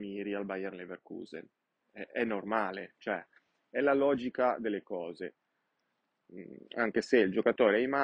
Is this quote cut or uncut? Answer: cut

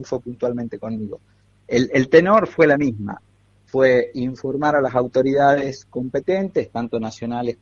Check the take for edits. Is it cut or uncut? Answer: uncut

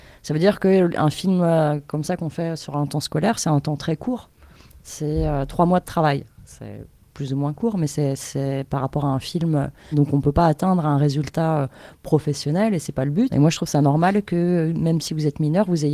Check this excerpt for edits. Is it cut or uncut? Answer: cut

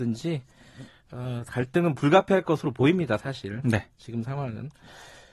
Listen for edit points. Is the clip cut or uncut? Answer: uncut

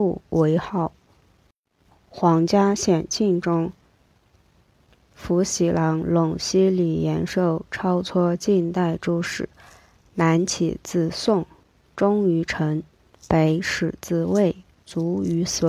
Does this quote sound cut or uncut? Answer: uncut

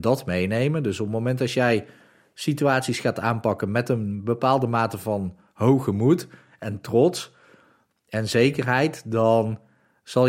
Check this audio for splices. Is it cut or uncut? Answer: uncut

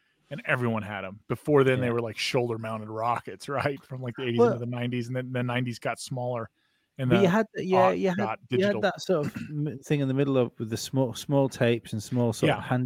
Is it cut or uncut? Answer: uncut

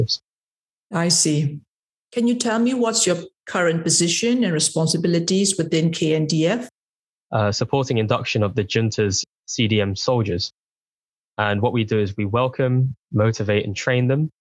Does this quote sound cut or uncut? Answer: cut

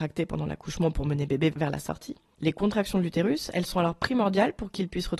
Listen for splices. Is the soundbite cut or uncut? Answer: cut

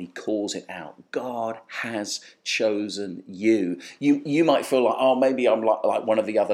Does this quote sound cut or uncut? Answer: uncut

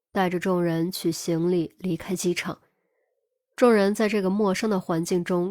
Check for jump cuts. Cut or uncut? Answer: cut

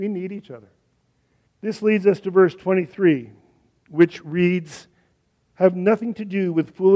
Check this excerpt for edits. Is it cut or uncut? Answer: cut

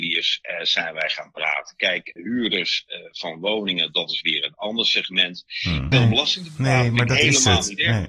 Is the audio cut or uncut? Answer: cut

